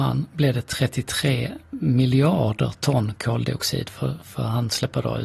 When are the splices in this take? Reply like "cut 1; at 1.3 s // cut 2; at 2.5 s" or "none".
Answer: none